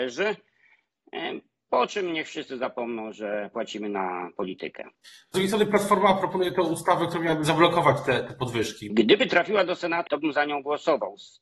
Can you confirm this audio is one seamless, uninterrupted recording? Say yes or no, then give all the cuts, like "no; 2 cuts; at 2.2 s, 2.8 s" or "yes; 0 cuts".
no; 3 cuts; at 4.9 s, 8.9 s, 10.1 s